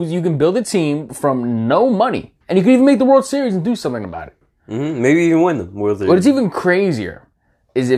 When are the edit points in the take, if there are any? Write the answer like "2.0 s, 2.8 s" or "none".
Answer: 2.4 s